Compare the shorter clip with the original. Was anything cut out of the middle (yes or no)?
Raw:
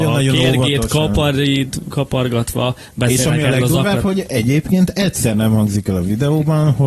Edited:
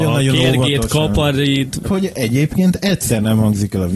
yes